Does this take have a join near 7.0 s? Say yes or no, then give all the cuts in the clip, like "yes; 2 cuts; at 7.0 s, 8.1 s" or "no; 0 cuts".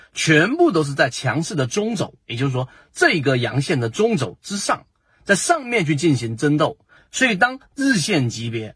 yes; 1 cut; at 7.0 s